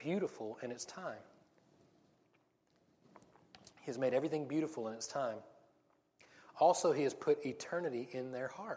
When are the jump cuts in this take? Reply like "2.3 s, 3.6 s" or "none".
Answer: none